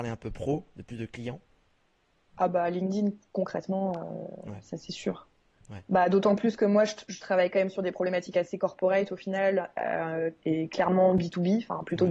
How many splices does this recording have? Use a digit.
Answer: 1